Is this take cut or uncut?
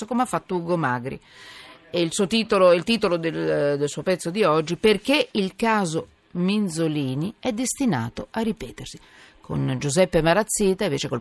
uncut